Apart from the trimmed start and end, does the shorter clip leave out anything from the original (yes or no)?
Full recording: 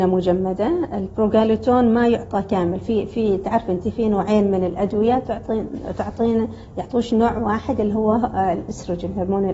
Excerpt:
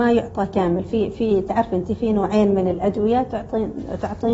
no